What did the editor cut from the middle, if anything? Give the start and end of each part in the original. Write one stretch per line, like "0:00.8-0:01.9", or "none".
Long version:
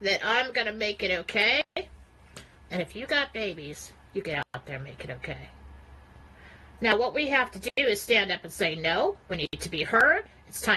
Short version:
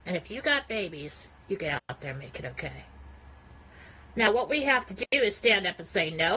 none